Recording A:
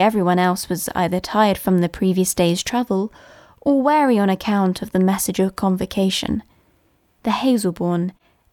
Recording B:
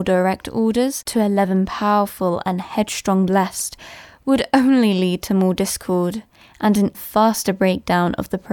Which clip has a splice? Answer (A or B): B